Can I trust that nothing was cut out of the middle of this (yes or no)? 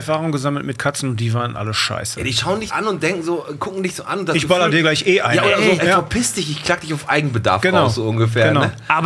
no